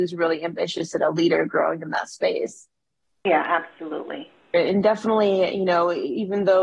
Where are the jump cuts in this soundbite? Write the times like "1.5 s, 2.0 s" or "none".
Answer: 4.5 s